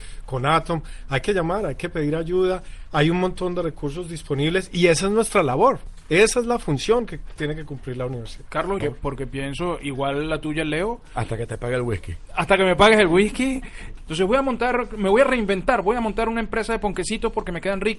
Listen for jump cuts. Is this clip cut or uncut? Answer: cut